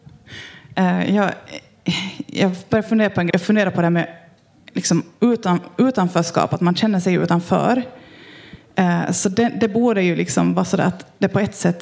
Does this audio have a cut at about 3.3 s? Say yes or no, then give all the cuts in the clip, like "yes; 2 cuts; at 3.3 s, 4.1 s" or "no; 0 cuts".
yes; 1 cut; at 3.3 s